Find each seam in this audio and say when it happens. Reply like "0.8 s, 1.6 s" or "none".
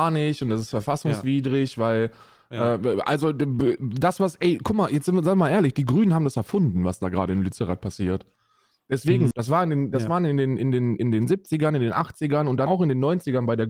9.3 s, 12.7 s